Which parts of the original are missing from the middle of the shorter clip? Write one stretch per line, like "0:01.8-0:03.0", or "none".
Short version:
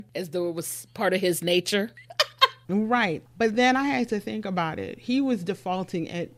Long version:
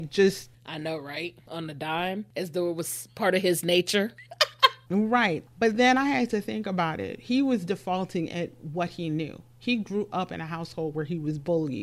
none